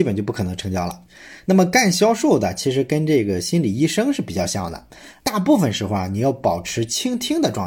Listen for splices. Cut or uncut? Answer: uncut